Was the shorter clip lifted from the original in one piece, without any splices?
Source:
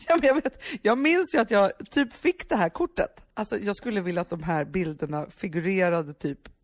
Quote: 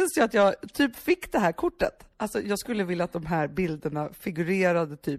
yes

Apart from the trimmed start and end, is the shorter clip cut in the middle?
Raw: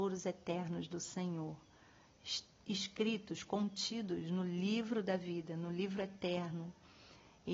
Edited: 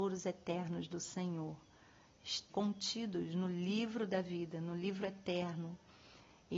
yes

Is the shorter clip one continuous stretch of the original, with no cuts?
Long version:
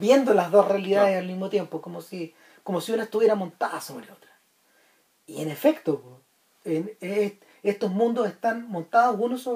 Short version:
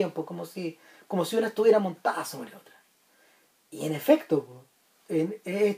yes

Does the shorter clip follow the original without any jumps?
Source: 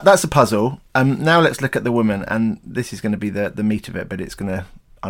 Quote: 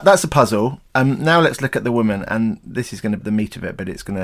no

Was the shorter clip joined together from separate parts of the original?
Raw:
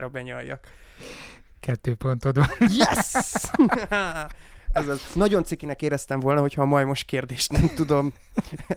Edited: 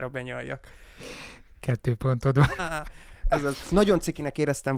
yes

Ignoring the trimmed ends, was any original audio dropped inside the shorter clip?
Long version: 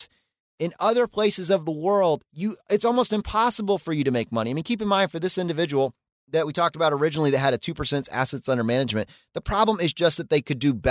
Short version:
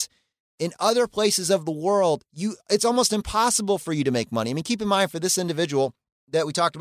no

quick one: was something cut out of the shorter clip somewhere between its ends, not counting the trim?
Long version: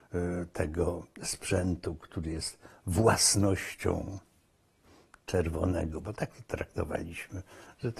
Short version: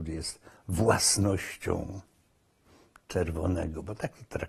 no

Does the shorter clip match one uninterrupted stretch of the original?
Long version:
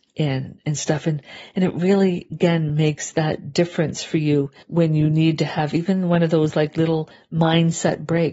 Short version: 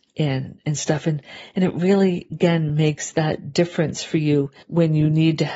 yes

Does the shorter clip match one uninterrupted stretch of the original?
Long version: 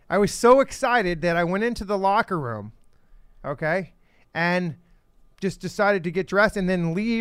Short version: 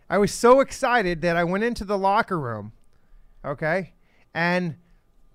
yes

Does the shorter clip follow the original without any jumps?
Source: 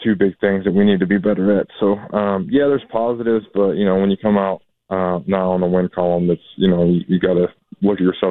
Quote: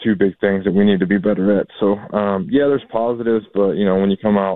yes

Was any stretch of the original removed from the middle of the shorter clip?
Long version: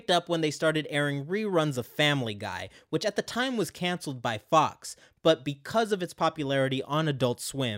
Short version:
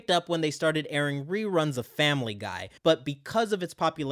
yes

